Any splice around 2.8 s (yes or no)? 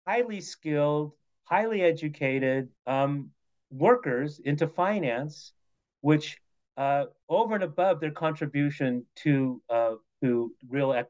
yes